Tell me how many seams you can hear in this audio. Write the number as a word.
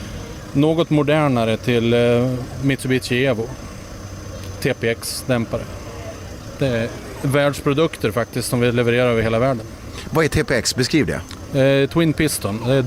zero